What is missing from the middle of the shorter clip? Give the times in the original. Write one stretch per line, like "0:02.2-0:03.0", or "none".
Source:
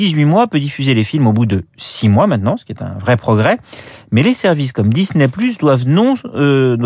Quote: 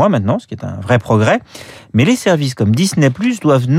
none